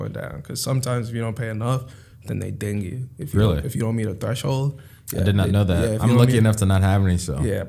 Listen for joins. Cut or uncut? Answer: uncut